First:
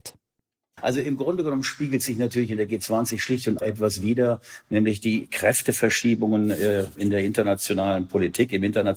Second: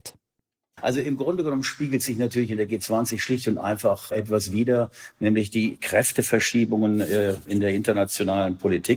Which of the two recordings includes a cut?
first; 1 cut; at 3.6 s

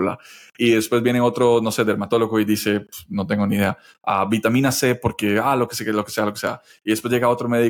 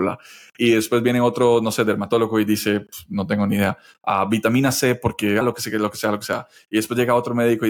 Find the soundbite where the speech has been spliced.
second; 1 cut; at 5.4 s

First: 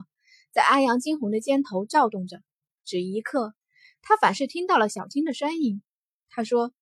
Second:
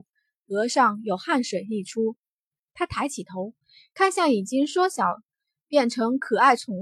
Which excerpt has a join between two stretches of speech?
first; 1 cut; at 2.7 s

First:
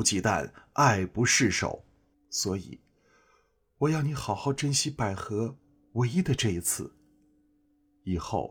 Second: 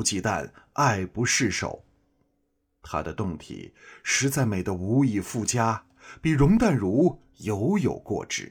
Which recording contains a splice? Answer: first; 1 cut; at 2.1 s

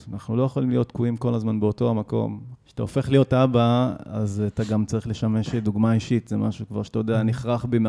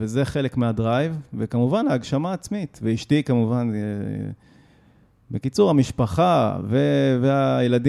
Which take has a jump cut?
first; 1 cut; at 2.5 s

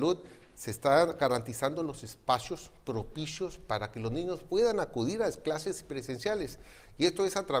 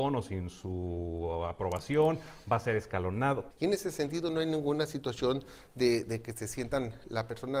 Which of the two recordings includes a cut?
second; 1 cut; at 3.5 s

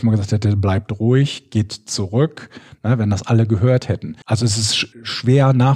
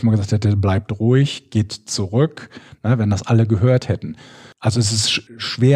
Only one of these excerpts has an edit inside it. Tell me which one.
first; 1 cut; at 4.2 s

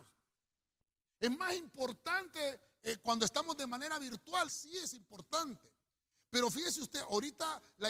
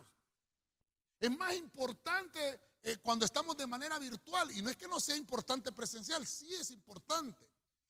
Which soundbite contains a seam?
first; 1 cut; at 4.5 s

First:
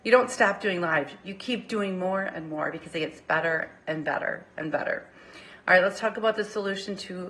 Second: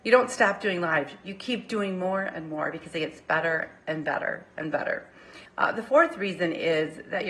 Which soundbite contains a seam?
second; 1 cut; at 5.5 s

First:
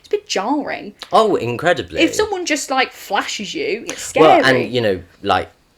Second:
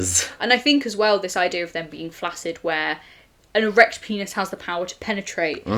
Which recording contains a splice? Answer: first; 1 cut; at 3.9 s

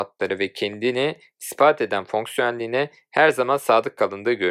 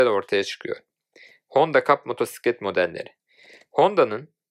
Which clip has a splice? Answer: second; 1 cut; at 1.3 s

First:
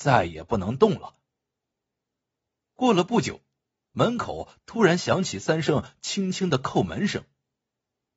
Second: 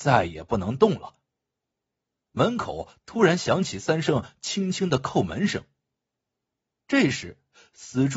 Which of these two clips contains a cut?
second; 1 cut; at 2.2 s

